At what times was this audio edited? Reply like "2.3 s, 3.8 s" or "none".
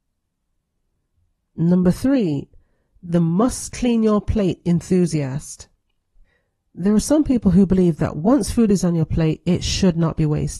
none